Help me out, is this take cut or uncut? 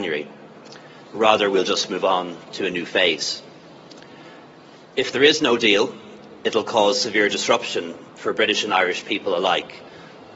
cut